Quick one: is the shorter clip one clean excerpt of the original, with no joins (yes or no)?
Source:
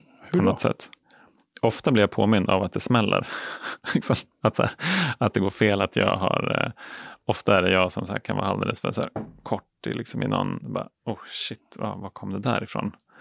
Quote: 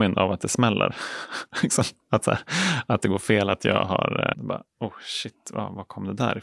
no